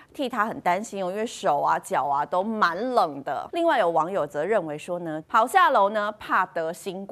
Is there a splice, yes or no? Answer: yes